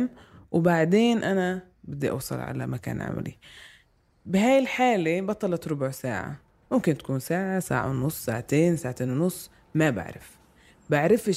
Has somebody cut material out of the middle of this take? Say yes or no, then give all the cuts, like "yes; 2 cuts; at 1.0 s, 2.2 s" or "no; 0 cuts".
no; 0 cuts